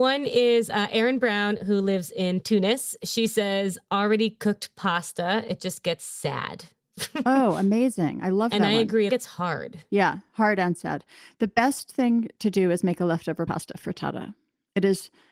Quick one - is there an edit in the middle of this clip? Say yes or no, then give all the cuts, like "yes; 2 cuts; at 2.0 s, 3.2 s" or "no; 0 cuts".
yes; 1 cut; at 9.1 s